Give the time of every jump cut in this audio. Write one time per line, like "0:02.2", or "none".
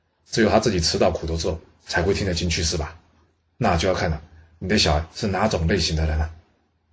0:03.5

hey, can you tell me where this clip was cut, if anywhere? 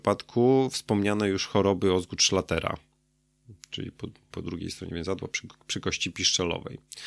0:04.3

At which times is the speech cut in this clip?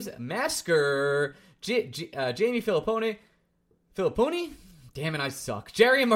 none

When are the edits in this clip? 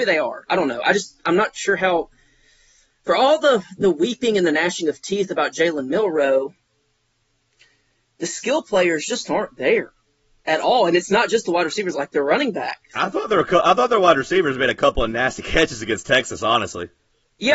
0:11.9

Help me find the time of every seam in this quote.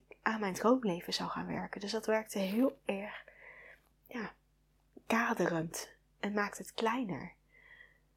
0:03.9

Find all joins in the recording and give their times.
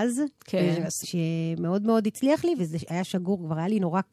0:01.0
0:02.6

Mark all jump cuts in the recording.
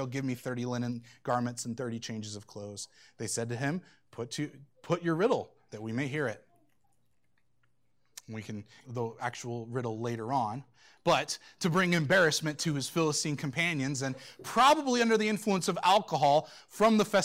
0:08.8

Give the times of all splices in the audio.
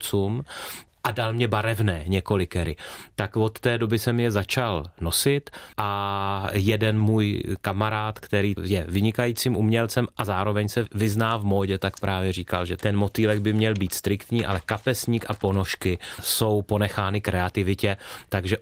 none

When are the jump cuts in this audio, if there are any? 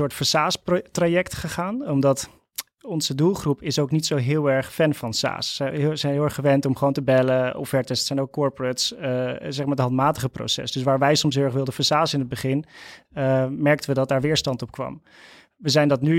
none

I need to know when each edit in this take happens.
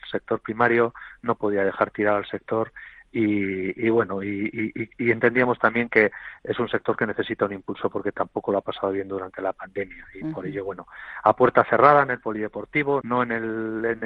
0:13.0

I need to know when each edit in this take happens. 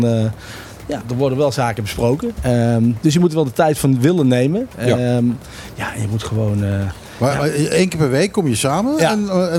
0:01.0

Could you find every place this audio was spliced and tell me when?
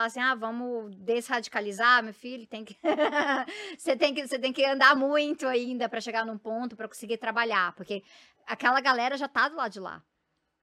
none

